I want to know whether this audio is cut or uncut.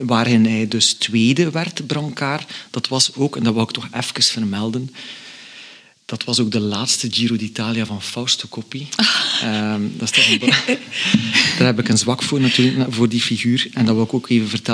uncut